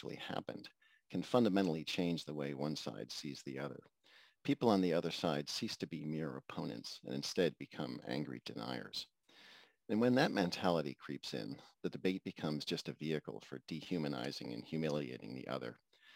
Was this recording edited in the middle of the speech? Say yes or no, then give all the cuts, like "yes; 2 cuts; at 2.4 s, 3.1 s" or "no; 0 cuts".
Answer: no; 0 cuts